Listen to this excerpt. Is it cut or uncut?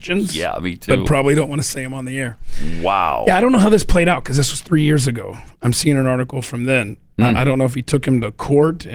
uncut